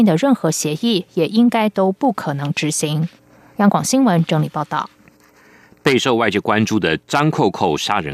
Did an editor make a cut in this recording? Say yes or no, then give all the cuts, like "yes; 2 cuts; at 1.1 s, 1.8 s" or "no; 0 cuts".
no; 0 cuts